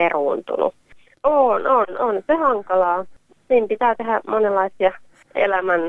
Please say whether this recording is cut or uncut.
cut